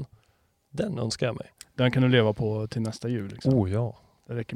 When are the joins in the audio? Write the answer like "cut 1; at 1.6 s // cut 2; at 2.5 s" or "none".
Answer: none